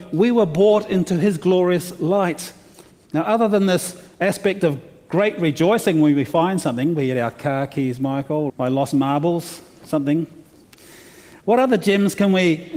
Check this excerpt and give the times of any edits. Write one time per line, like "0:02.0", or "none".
0:02.9
0:08.5